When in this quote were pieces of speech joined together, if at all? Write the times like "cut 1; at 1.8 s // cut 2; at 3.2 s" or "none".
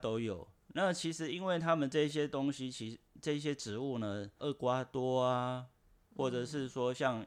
cut 1; at 4.4 s